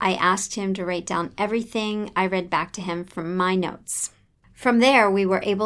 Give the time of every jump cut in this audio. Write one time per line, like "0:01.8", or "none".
0:04.4